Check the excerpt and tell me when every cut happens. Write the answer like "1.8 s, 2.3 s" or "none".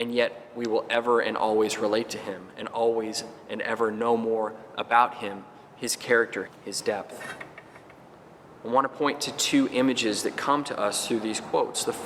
6.5 s, 8.6 s